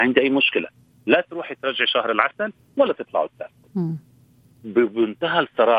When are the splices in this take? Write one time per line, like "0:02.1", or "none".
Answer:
none